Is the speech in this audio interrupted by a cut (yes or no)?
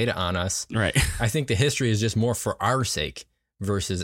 no